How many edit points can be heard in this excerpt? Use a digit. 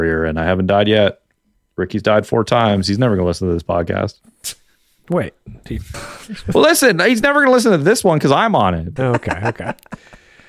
2